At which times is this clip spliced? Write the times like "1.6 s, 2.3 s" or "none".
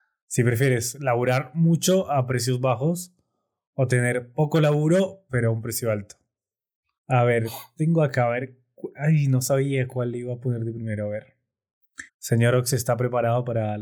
6.9 s, 12.1 s